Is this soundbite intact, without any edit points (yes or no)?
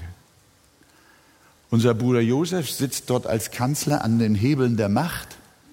yes